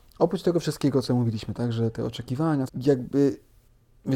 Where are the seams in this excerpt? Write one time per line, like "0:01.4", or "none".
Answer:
0:02.7